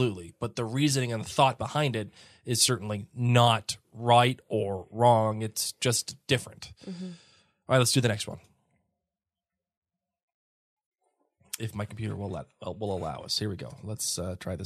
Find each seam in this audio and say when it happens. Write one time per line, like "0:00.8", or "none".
none

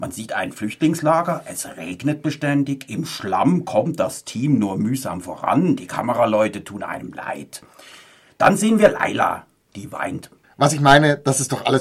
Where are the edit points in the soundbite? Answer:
0:10.4

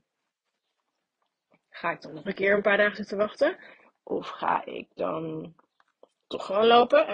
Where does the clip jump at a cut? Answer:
none

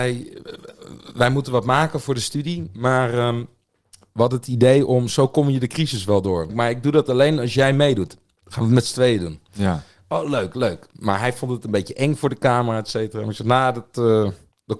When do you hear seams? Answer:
0:06.5

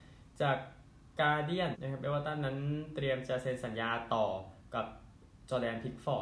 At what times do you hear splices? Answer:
0:01.7

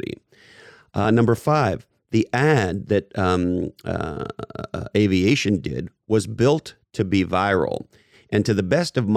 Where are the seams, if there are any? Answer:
none

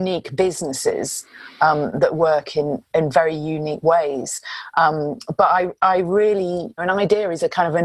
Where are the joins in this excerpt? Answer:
0:06.8

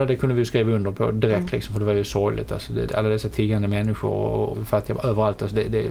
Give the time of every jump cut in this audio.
0:02.9
0:04.5

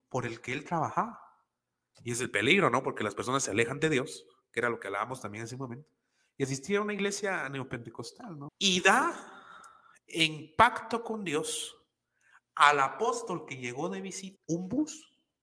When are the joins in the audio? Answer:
0:01.9
0:08.5
0:14.4

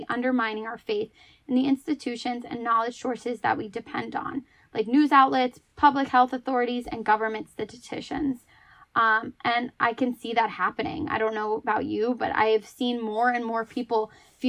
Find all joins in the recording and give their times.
none

